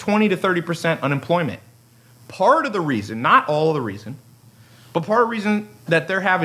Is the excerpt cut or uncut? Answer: uncut